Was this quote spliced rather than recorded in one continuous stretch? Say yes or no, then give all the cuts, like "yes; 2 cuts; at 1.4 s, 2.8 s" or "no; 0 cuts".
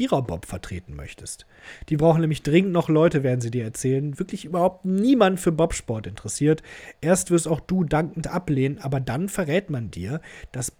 yes; 1 cut; at 4.1 s